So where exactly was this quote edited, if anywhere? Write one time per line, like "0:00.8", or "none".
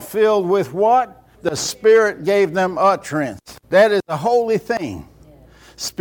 0:01.3
0:03.6